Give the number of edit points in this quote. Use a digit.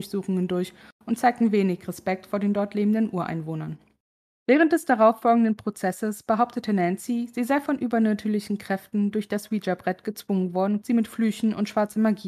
1